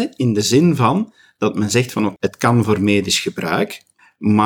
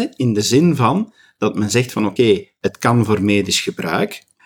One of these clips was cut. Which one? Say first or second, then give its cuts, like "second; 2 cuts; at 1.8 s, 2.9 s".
first; 1 cut; at 2.2 s